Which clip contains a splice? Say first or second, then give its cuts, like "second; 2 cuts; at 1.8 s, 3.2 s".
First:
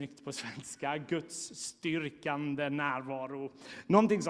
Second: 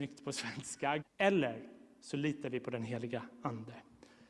second; 1 cut; at 1.0 s